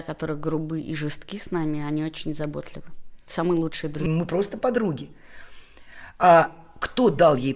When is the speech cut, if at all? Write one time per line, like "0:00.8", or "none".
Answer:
0:04.1